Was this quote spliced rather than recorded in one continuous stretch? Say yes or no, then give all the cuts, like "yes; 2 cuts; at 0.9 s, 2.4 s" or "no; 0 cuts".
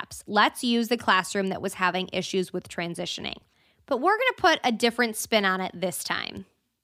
no; 0 cuts